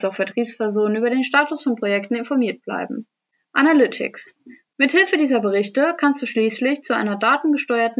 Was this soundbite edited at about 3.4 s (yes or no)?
no